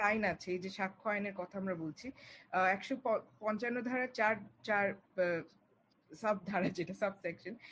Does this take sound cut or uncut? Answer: uncut